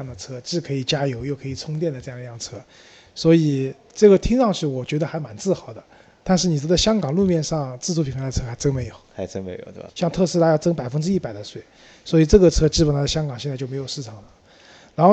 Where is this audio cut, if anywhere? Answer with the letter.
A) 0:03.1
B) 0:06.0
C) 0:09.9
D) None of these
C